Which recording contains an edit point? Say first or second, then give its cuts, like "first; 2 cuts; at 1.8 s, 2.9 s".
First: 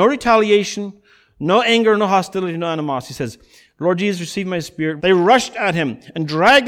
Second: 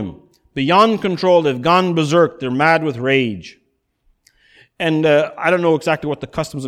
first; 1 cut; at 5.0 s